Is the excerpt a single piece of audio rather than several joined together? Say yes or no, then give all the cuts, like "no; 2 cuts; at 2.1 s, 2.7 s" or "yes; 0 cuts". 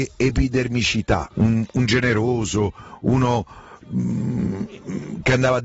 no; 1 cut; at 1.3 s